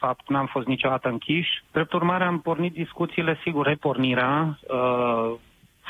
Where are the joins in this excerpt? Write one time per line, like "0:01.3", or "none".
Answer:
0:01.6
0:03.6